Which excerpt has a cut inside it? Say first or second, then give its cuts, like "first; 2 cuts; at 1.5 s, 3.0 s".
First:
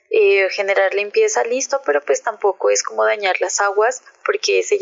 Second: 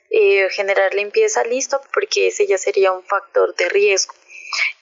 second; 1 cut; at 1.8 s